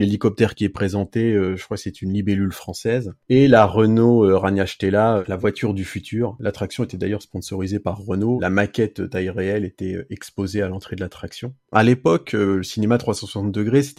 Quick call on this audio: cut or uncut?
cut